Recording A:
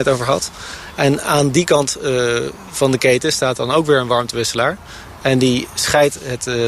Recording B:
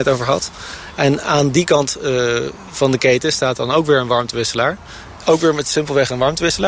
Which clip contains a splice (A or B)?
B